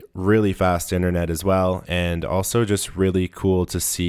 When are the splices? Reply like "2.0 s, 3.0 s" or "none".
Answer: 1.8 s